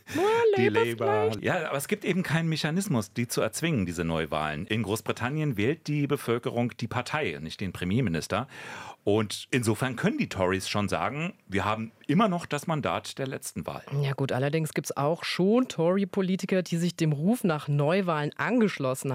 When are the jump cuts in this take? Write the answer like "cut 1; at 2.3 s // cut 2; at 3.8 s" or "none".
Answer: none